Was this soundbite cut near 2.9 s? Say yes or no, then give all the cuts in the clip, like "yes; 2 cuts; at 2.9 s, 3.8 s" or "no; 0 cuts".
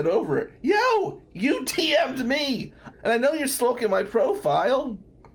yes; 1 cut; at 2.9 s